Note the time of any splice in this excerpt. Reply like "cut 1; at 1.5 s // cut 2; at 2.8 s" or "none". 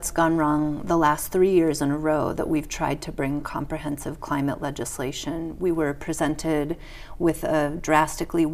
none